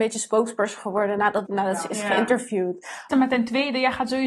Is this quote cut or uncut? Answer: cut